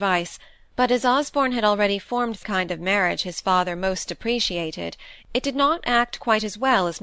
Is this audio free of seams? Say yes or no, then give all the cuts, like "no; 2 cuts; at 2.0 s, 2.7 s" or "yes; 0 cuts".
no; 1 cut; at 2.4 s